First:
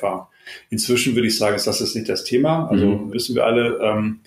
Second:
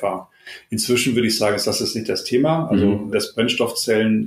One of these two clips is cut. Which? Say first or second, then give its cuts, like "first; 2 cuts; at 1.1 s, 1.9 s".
first; 1 cut; at 3.1 s